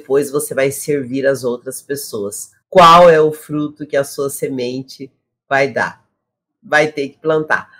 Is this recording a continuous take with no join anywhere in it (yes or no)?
no